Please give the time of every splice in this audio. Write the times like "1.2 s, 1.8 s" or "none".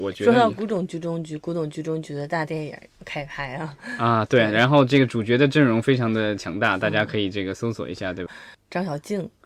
8.3 s

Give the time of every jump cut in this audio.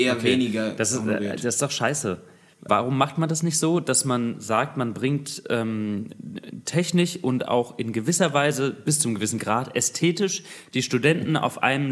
2.7 s

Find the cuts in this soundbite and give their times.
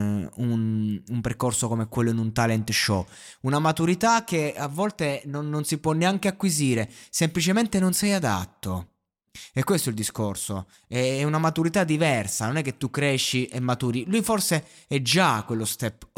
none

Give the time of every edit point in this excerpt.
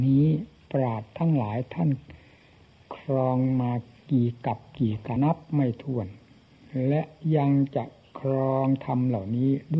5.2 s

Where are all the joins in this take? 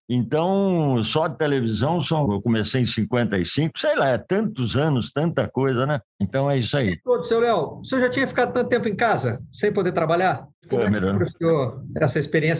2.3 s, 10.5 s

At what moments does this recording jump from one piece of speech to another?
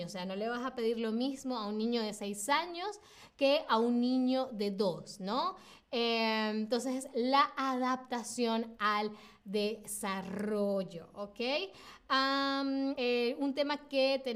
12.9 s

